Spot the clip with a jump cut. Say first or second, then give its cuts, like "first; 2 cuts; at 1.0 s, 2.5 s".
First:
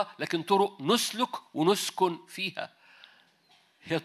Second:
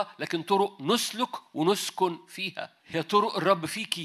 second; 1 cut; at 2.8 s